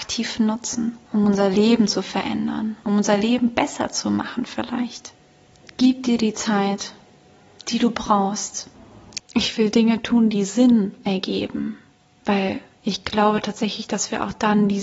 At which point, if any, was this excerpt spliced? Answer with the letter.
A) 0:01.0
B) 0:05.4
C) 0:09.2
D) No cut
C